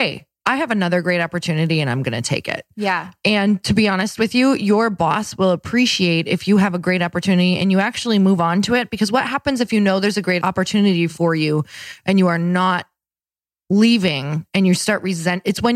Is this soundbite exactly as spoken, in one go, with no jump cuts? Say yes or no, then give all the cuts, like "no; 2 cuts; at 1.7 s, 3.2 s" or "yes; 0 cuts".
yes; 0 cuts